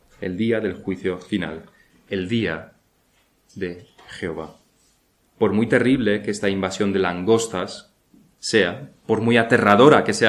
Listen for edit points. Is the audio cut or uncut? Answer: cut